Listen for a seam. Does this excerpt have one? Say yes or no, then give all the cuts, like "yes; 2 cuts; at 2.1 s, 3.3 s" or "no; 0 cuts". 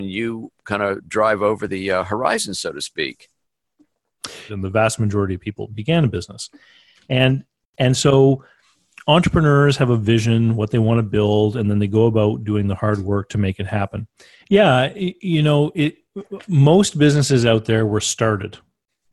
yes; 2 cuts; at 4.5 s, 14.4 s